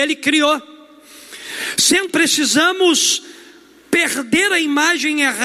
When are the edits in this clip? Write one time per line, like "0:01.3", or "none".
0:02.1